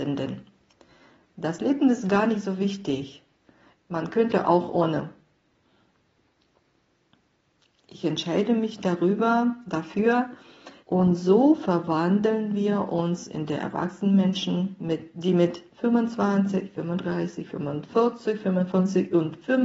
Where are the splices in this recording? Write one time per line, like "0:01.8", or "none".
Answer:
0:03.7
0:10.8